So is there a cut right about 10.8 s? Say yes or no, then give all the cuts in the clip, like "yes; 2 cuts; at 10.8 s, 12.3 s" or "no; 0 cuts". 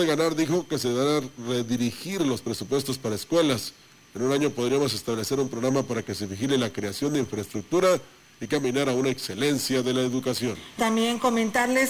yes; 1 cut; at 10.8 s